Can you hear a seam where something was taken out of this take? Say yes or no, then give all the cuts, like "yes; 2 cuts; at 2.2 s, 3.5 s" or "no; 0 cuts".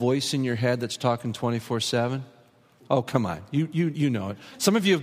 no; 0 cuts